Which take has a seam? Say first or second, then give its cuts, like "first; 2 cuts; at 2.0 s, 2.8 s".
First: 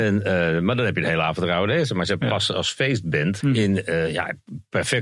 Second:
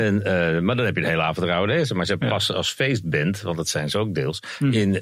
first; 1 cut; at 3.4 s